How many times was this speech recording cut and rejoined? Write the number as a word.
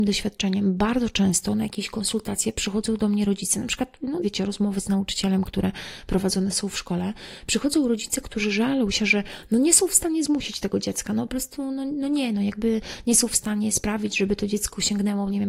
one